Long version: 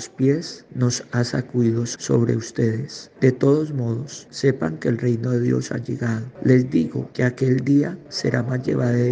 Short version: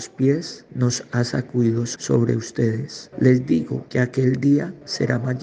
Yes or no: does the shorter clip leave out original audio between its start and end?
yes